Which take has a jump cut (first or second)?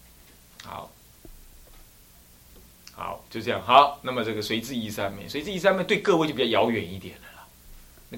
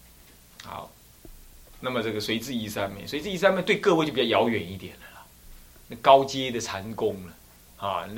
second